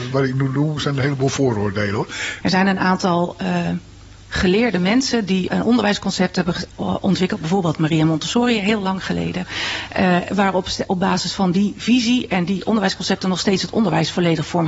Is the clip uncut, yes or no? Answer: no